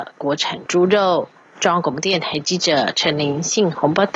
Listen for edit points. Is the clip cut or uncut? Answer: uncut